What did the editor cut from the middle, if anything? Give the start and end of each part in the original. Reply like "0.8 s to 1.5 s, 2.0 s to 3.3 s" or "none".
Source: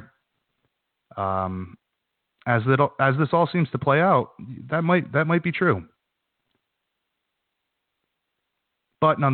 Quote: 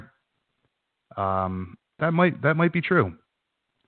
2.0 s to 4.7 s